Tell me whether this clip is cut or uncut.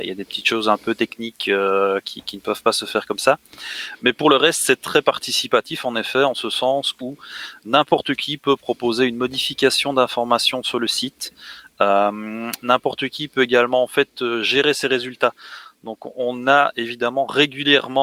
uncut